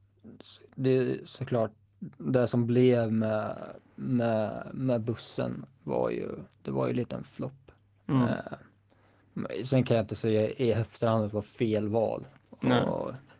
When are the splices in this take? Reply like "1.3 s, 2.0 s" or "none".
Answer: none